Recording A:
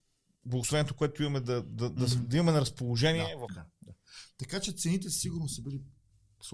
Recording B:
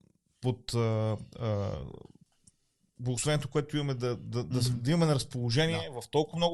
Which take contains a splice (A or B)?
A